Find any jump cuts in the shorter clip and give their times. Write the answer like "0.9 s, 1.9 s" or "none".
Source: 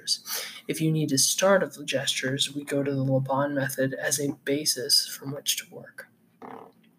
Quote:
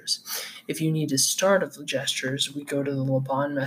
none